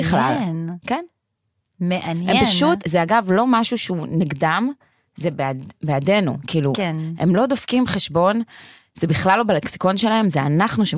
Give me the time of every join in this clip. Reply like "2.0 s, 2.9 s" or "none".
2.8 s